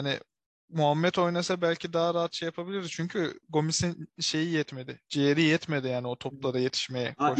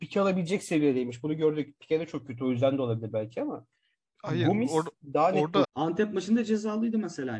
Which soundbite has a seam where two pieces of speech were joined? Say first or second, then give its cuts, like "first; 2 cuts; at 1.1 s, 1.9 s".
second; 1 cut; at 5.6 s